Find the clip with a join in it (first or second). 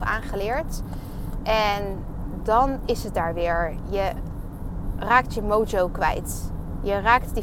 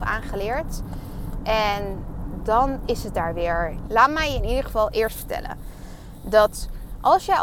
second